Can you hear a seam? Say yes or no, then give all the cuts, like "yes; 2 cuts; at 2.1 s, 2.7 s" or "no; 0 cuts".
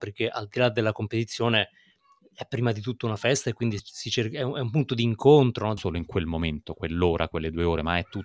yes; 2 cuts; at 3.8 s, 5.8 s